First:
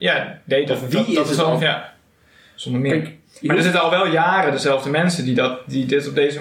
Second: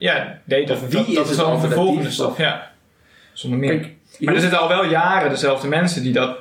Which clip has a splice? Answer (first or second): first